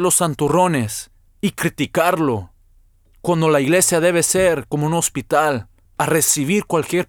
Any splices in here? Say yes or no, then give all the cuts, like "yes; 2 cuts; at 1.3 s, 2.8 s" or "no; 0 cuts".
no; 0 cuts